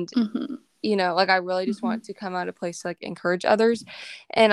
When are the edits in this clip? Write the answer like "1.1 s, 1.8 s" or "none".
none